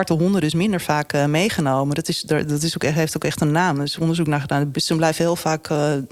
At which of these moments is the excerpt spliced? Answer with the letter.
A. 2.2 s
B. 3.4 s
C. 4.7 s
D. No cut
C